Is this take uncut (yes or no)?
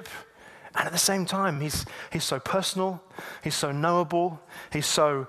yes